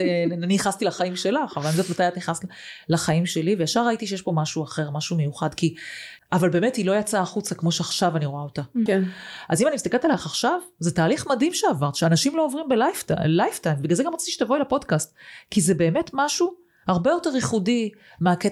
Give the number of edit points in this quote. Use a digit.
2